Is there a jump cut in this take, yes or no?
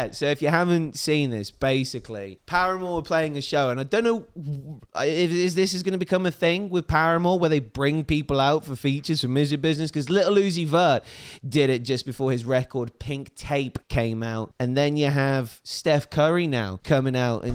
no